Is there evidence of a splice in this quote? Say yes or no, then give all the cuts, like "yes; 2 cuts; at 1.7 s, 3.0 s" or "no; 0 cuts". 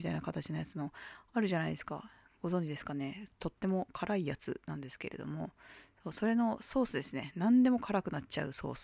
no; 0 cuts